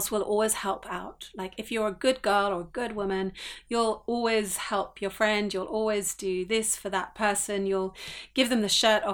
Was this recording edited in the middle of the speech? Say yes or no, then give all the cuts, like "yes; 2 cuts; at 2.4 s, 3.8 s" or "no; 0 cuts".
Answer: no; 0 cuts